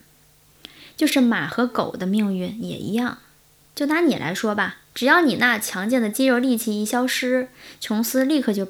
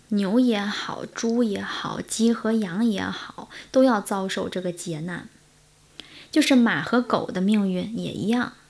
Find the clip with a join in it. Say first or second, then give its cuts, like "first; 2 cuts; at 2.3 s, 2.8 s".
first; 1 cut; at 4.9 s